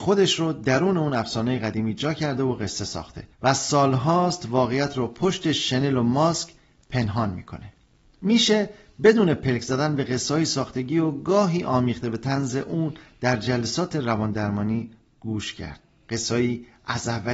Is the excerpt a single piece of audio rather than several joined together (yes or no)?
no